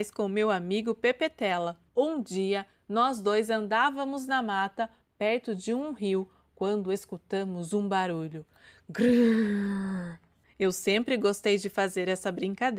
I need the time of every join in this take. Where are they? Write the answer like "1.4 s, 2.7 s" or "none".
1.9 s, 10.4 s